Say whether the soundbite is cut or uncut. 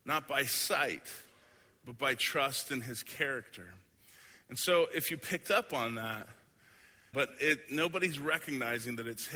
cut